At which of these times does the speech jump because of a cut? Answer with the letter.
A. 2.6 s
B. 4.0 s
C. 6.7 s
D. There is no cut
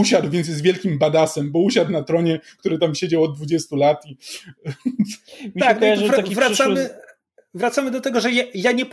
A